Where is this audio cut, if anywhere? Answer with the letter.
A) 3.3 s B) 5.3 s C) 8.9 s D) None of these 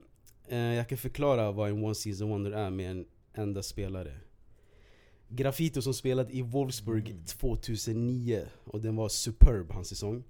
B